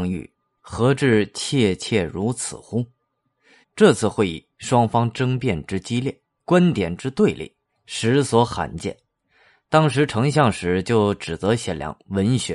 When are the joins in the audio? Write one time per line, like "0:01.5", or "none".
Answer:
0:03.6